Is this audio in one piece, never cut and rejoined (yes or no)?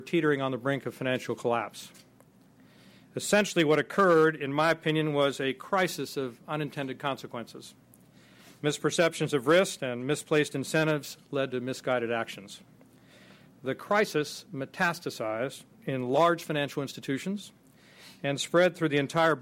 yes